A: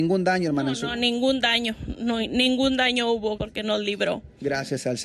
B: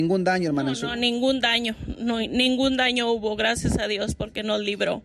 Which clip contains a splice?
A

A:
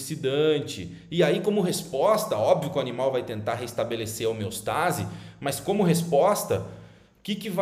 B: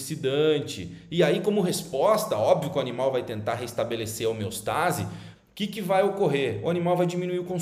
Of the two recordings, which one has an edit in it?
B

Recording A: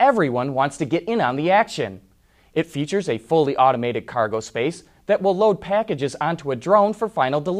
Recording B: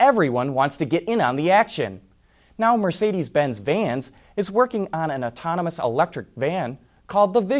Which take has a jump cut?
A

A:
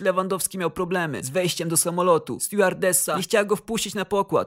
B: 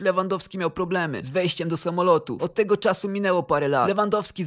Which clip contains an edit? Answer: B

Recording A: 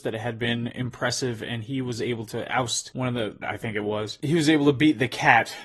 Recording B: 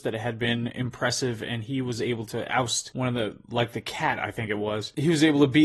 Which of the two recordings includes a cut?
A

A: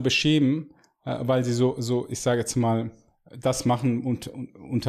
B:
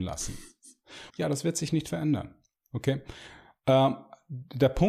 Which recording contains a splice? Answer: B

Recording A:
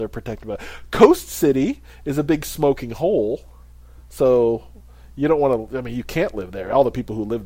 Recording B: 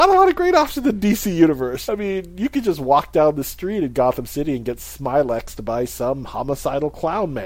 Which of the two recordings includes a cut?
B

